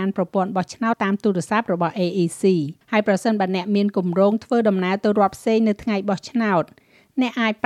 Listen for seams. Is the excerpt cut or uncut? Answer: cut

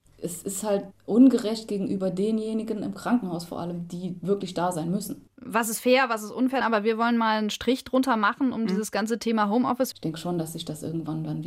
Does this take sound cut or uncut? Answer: cut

